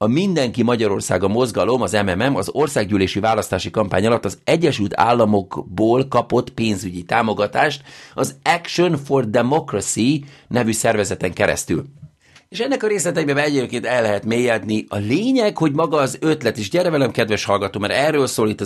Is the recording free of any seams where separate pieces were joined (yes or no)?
yes